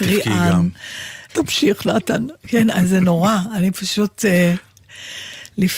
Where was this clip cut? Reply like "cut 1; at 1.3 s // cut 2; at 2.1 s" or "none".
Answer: cut 1; at 1.3 s